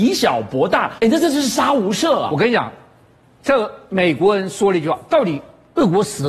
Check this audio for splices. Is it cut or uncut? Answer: cut